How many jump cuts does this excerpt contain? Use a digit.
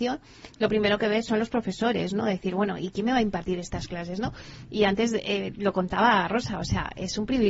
0